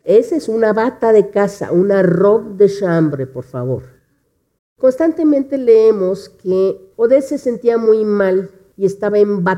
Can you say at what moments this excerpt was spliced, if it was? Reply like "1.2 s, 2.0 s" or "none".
4.6 s